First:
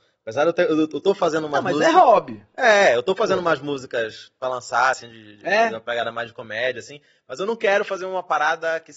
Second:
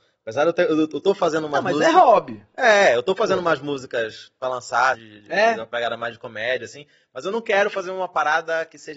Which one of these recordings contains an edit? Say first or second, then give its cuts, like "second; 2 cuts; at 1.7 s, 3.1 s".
second; 1 cut; at 4.9 s